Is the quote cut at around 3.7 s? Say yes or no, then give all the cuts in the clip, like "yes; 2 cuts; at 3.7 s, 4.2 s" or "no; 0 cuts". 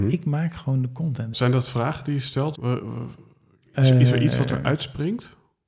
no; 2 cuts; at 1.3 s, 2.5 s